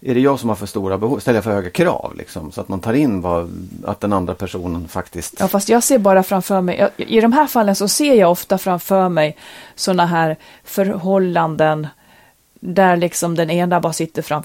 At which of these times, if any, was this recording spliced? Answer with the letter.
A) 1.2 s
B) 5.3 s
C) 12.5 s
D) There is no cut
C